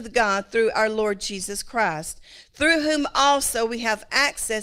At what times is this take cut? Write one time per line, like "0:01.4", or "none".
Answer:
none